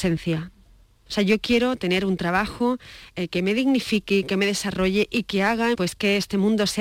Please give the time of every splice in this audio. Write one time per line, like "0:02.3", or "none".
0:01.1
0:05.7